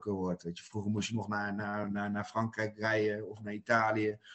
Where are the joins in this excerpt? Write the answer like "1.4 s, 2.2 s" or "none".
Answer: none